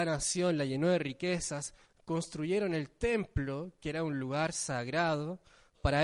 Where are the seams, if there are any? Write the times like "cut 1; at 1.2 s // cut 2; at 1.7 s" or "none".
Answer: none